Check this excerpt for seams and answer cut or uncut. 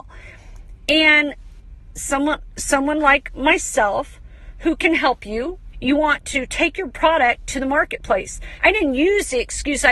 cut